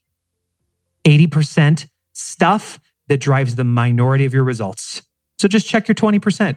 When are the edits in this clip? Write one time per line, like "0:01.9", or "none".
none